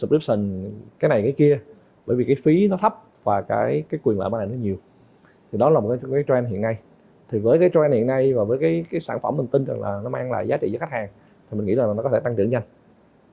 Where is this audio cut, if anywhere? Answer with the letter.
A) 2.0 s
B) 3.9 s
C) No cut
B